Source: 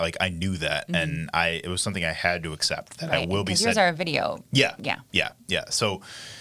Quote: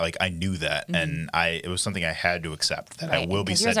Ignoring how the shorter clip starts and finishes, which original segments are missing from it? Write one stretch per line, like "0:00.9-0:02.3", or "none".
none